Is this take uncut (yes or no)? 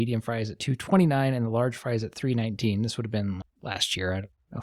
no